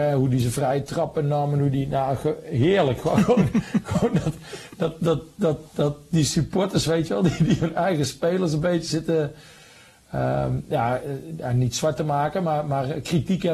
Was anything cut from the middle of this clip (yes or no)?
no